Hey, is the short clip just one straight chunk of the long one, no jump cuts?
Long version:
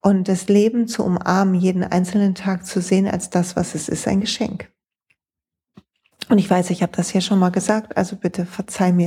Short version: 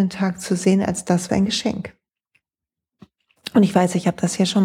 no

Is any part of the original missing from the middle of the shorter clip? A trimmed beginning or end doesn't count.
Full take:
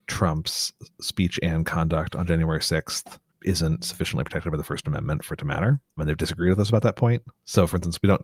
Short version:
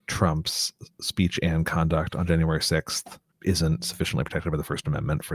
no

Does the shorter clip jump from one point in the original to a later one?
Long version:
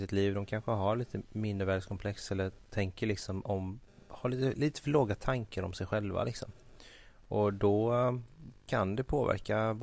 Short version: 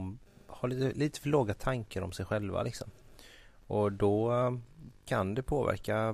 no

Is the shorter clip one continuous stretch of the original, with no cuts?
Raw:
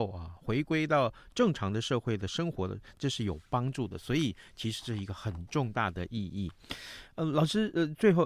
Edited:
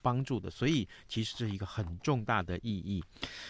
yes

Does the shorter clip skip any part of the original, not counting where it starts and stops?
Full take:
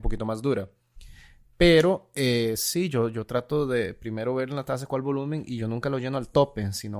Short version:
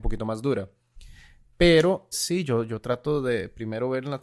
yes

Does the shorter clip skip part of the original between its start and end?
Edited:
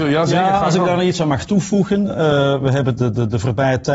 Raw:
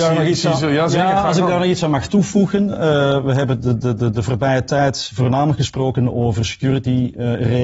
yes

